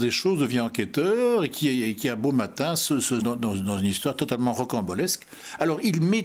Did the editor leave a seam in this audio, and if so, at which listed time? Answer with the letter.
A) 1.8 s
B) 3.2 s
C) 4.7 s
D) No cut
B